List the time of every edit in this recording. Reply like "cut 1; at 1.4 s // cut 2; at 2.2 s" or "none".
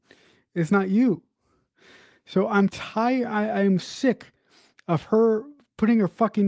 cut 1; at 3.8 s